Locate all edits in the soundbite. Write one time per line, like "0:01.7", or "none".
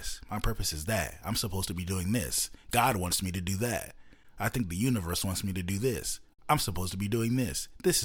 none